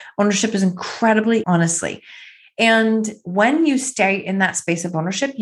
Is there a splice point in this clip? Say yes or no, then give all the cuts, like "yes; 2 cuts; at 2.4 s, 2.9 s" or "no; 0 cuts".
yes; 1 cut; at 1.4 s